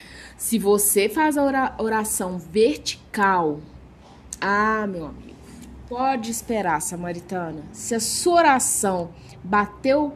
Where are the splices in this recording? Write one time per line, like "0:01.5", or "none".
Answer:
none